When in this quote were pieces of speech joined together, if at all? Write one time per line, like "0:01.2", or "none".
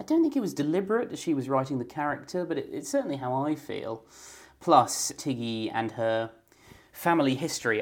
0:05.2